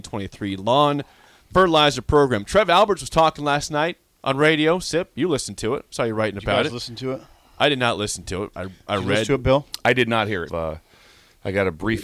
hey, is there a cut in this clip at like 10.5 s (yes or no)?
yes